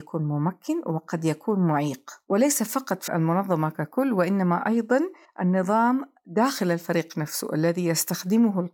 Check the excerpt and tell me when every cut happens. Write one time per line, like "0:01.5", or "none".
0:03.1